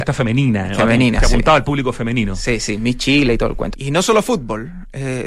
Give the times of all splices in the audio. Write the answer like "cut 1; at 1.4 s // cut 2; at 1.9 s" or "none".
cut 1; at 3.7 s